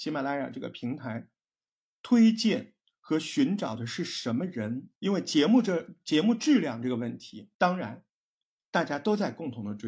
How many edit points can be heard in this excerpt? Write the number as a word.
two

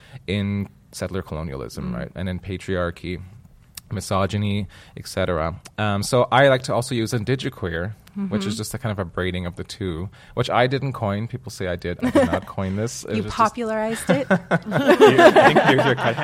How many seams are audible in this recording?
zero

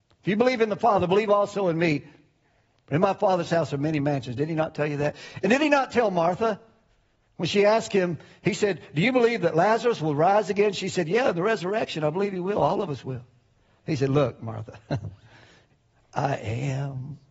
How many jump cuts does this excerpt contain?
zero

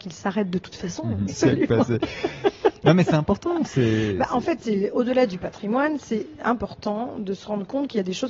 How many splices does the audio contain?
one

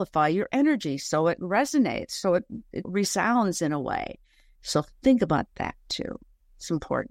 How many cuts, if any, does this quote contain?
two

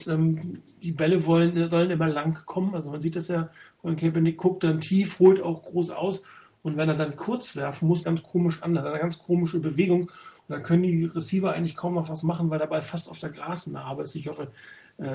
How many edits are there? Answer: one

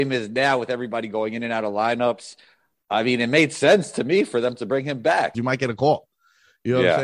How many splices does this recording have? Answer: one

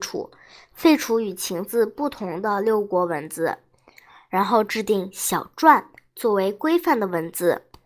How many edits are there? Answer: zero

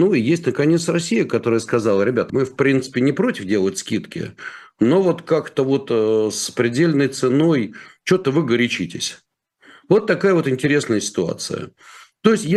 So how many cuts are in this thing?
one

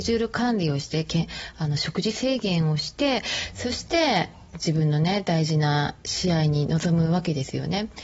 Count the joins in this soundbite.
one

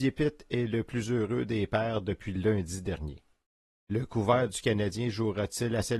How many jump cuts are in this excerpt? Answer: zero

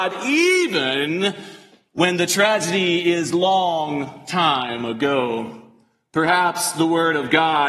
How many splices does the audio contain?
zero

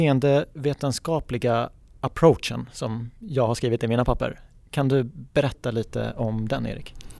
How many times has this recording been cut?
zero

